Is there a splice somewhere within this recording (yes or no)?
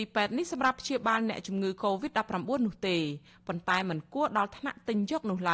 no